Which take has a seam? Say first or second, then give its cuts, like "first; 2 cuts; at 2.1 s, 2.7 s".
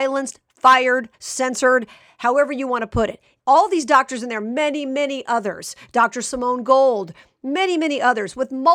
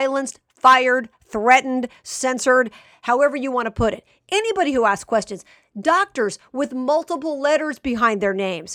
first; 2 cuts; at 1.1 s, 3.4 s